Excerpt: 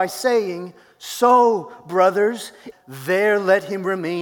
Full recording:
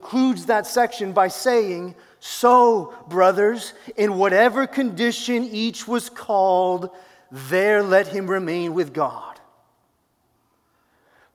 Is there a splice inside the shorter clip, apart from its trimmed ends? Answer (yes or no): yes